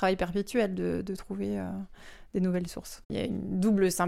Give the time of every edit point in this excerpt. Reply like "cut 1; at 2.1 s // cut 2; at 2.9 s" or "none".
cut 1; at 3.0 s